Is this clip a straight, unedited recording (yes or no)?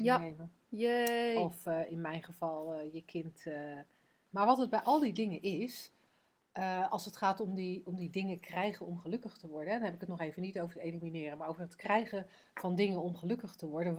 no